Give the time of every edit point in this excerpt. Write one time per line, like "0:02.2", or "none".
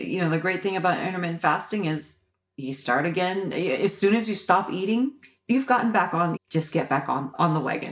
0:06.3